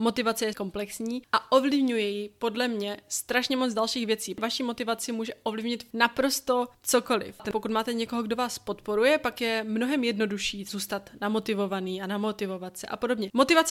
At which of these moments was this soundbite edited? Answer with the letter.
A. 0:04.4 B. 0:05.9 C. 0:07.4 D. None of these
C